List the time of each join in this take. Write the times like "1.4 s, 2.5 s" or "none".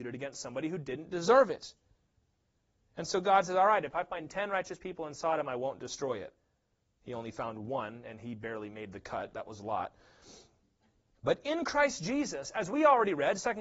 none